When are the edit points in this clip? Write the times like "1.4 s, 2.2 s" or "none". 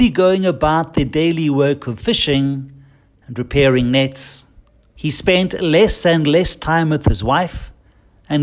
5.0 s